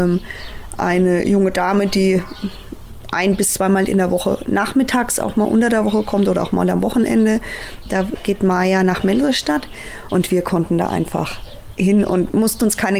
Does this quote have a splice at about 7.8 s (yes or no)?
yes